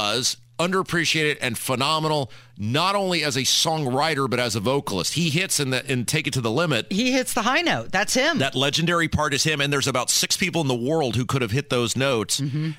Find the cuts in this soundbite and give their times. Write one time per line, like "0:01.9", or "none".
none